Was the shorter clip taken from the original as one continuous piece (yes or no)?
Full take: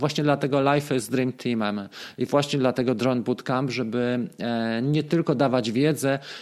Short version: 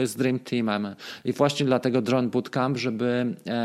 yes